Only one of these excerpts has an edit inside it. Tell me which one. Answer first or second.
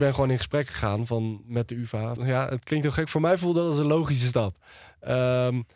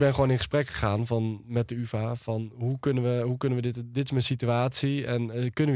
first